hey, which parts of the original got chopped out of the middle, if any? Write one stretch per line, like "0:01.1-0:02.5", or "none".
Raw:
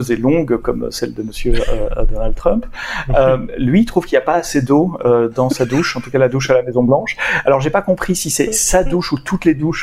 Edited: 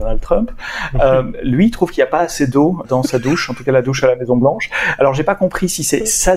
0:05.0-0:05.3